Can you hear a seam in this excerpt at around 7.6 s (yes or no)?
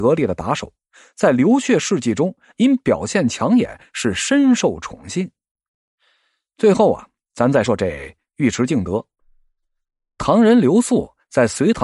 yes